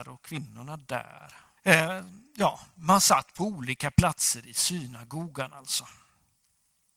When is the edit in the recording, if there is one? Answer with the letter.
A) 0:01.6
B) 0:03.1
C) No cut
A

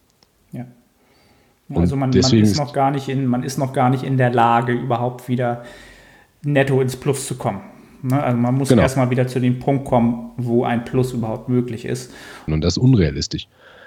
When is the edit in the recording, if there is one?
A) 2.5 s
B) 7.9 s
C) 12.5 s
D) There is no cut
C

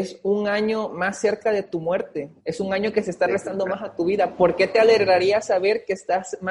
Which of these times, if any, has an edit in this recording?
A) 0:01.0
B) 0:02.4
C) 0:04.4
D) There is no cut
B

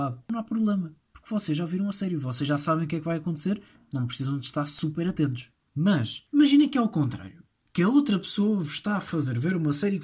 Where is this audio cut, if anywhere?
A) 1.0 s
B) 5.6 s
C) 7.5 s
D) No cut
D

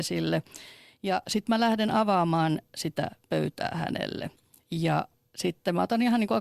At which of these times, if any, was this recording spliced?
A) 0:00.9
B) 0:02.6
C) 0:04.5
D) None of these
D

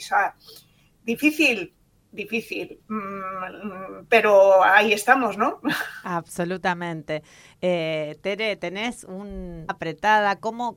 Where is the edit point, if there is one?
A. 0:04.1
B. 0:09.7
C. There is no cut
B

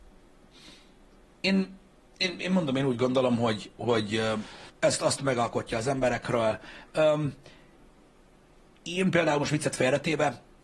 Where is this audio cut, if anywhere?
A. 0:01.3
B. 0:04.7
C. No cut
B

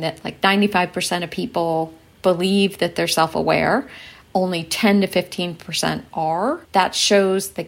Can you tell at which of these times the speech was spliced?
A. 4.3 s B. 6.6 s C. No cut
B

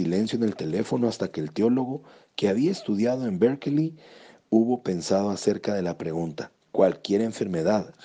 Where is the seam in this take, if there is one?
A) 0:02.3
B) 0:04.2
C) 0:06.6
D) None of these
C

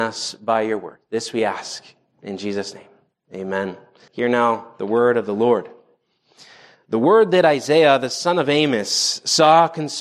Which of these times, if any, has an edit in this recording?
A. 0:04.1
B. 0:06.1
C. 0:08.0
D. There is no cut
A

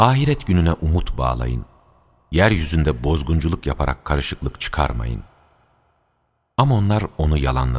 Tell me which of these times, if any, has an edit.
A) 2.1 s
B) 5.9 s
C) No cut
C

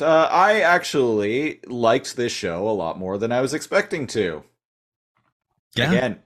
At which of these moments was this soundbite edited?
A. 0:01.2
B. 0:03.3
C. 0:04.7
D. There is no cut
D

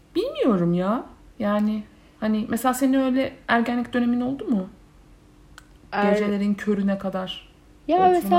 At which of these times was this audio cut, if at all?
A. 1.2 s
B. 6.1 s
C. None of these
C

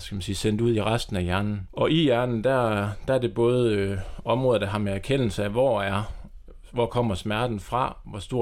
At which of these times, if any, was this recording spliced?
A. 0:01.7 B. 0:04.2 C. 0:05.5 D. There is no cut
A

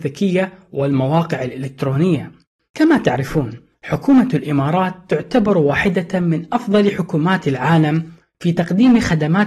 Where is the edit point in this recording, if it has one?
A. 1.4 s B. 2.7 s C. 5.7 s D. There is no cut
B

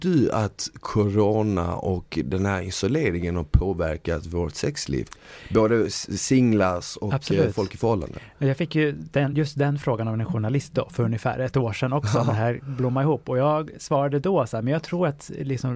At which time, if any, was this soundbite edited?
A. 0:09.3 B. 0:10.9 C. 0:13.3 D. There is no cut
D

